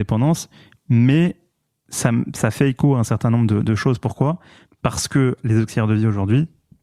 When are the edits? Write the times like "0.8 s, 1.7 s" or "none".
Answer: none